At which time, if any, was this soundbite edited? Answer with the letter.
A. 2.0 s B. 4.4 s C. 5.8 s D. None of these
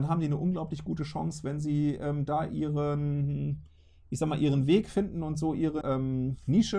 C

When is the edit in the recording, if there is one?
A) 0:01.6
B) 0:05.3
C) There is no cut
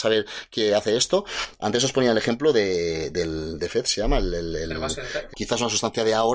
B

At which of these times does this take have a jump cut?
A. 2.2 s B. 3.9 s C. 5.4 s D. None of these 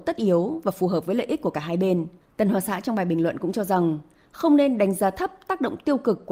A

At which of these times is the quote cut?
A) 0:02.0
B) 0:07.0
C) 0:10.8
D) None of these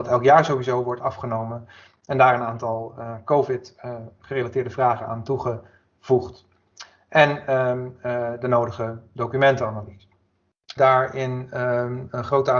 C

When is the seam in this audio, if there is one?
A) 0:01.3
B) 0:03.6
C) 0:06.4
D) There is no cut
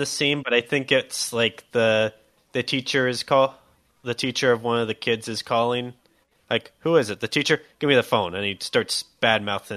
C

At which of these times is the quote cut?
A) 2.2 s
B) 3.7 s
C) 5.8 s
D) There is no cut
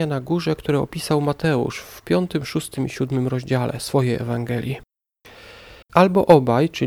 C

